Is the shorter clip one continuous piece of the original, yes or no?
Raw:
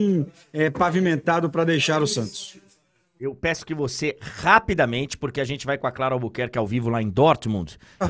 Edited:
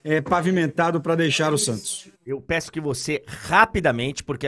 no